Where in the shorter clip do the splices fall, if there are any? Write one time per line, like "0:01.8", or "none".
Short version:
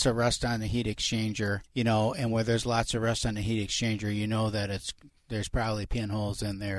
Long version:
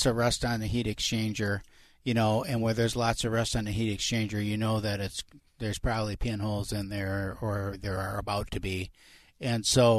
0:01.7